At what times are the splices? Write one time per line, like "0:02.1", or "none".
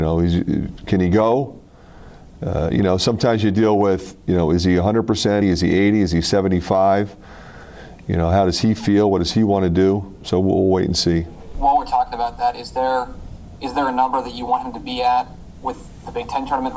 0:05.4